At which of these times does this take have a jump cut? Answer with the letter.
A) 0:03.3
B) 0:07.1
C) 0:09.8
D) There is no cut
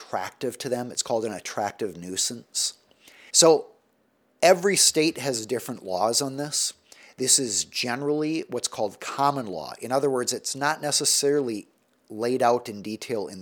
A